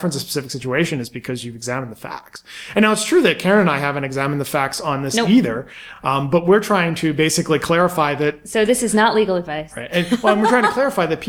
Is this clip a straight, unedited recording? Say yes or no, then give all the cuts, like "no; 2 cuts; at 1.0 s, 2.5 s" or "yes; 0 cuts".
yes; 0 cuts